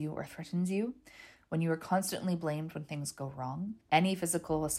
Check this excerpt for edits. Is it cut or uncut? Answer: cut